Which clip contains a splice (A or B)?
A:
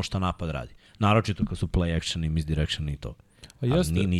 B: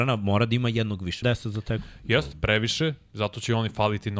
B